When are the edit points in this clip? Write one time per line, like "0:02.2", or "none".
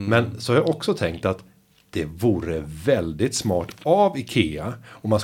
none